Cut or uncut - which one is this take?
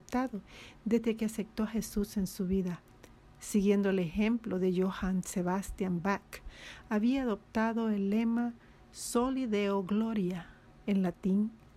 uncut